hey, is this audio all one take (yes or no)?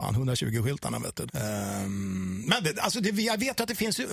no